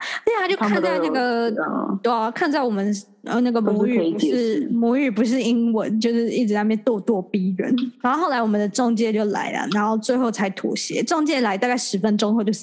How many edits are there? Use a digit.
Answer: 0